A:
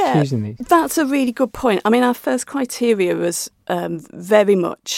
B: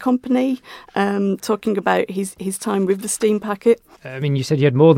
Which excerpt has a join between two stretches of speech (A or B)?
B